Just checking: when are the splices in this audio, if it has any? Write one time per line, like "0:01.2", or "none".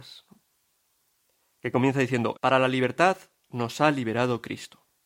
0:02.3